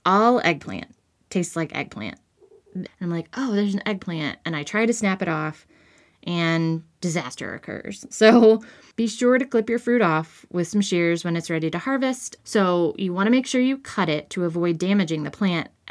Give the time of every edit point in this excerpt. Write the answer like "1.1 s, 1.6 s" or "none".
2.9 s, 12.4 s